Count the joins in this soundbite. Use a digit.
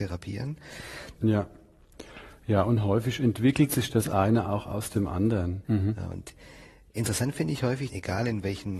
3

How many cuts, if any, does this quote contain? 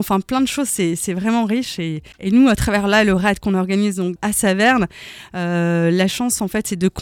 2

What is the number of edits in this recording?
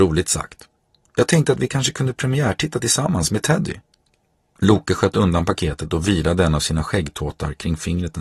2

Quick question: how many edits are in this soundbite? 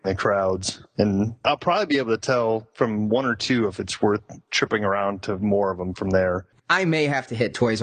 1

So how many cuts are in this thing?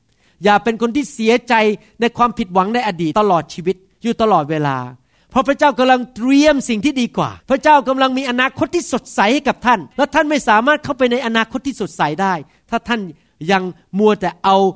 3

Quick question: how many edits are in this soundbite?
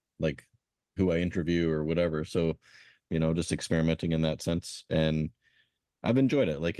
1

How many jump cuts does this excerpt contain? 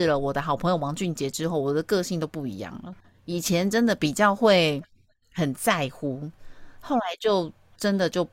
0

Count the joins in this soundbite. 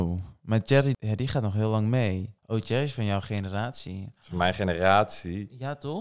1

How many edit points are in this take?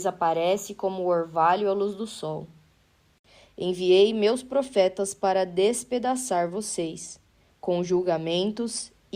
1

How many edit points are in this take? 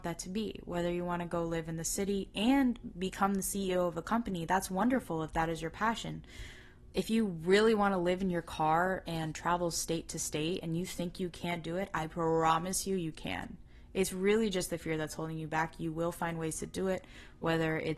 1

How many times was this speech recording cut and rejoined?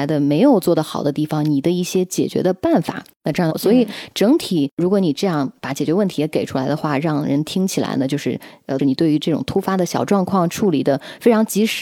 2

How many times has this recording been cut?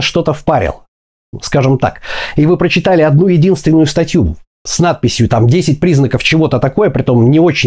0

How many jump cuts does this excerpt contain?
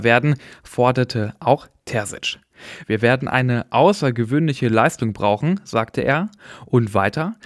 1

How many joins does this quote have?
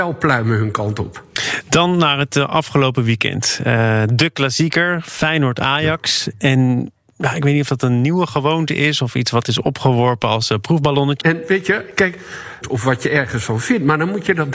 2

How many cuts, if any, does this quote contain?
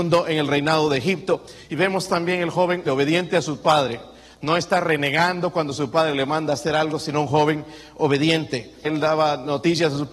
2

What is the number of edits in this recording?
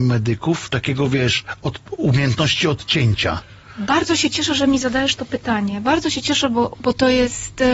1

